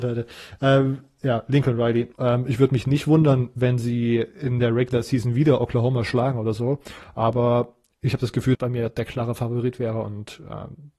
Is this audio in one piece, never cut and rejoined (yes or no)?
no